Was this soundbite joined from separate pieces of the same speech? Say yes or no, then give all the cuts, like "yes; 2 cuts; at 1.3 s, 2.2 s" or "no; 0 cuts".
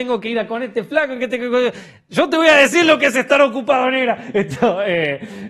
no; 0 cuts